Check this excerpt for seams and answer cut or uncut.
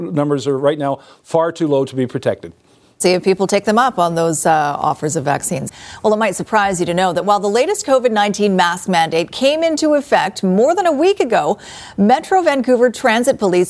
cut